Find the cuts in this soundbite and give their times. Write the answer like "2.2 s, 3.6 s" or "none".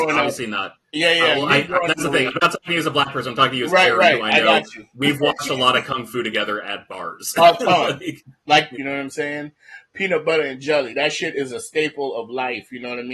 1.9 s, 8.7 s